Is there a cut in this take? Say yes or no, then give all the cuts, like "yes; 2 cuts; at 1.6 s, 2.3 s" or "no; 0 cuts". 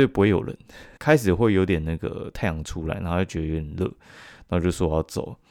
yes; 1 cut; at 1.0 s